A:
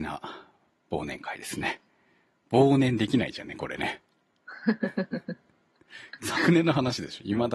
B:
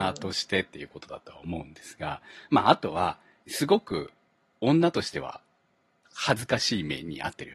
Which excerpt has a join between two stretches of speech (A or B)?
B